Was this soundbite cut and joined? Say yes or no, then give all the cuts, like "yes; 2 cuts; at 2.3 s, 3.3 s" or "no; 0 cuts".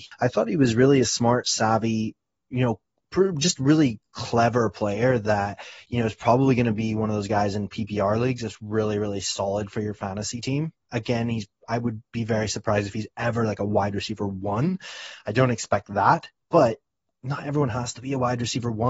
no; 0 cuts